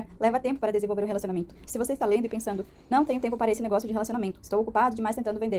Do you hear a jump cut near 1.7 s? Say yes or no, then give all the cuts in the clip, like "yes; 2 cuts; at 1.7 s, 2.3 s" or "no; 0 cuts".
yes; 1 cut; at 1.7 s